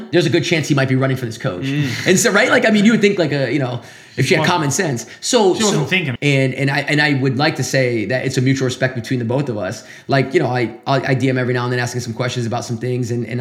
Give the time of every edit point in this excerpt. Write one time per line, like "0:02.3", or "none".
0:06.2